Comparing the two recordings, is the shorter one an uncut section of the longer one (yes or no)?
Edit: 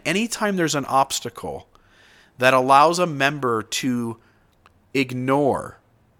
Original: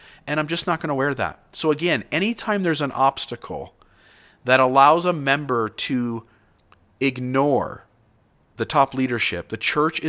yes